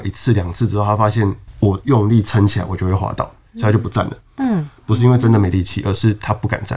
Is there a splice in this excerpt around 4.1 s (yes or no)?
no